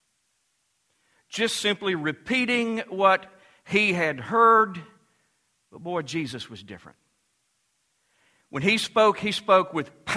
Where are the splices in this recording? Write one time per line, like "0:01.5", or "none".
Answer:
none